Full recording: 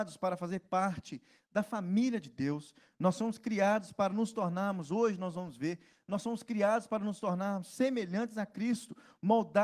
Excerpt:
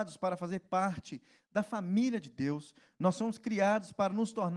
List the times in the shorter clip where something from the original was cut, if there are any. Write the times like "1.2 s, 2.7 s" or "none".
none